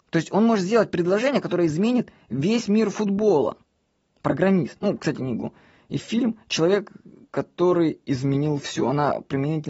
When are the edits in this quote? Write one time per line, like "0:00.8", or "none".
0:05.1